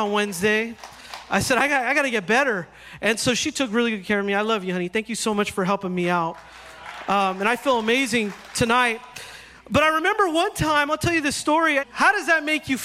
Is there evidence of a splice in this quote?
yes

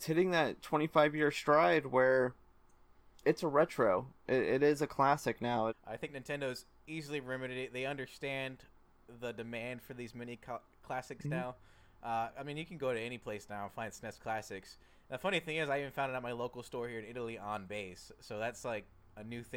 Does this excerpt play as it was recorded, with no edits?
no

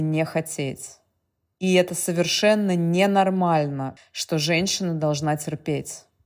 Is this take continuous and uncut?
no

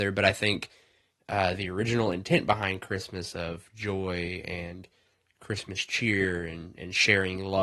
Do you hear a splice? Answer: no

